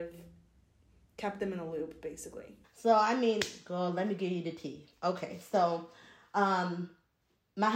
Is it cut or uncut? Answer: cut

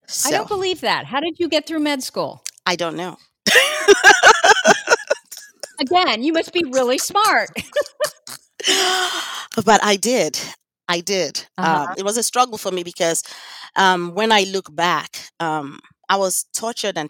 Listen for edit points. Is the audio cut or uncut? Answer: cut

